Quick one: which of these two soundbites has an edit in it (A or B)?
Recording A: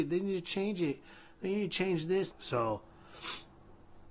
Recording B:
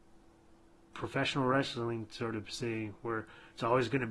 A